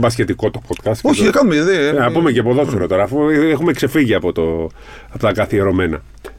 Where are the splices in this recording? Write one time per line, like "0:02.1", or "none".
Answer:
none